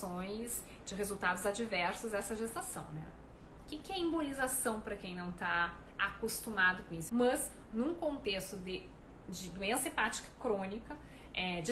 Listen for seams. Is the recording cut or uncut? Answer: cut